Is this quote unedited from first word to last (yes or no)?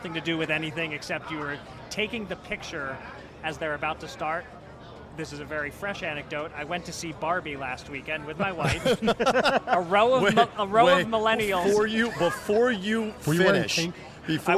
yes